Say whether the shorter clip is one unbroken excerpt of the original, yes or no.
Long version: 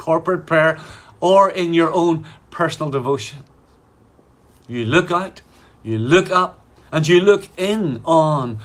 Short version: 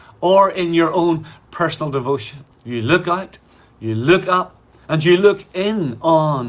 no